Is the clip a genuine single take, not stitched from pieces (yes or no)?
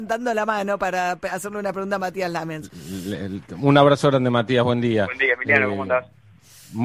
yes